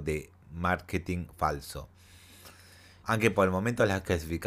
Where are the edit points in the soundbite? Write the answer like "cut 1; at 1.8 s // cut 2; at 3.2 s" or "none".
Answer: cut 1; at 3.0 s